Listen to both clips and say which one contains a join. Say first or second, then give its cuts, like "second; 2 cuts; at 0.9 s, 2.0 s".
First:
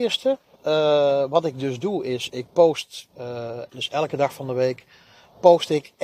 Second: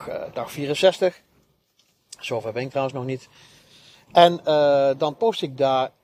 first; 1 cut; at 3.7 s